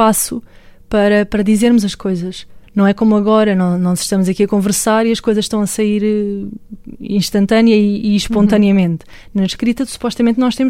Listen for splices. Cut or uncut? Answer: uncut